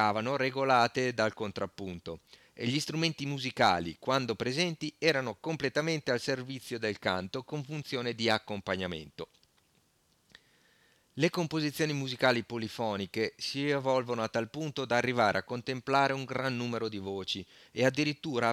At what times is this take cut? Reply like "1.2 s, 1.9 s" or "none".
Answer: none

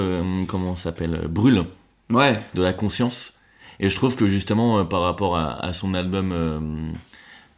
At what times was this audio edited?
2.5 s

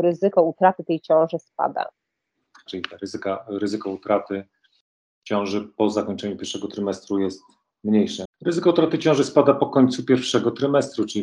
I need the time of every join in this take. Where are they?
2.7 s, 8.3 s

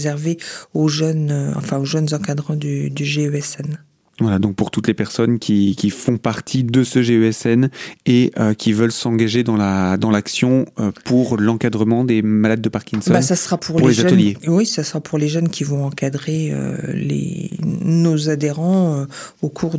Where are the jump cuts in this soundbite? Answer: none

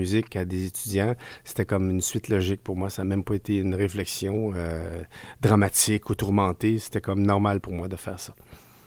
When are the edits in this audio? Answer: none

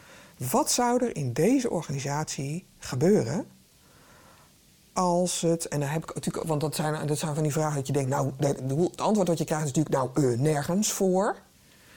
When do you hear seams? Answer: none

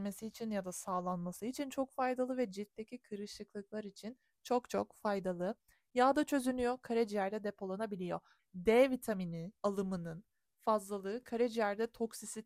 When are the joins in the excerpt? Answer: 8.4 s, 9.6 s

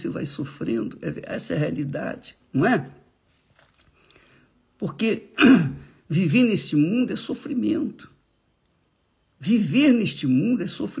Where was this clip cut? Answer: none

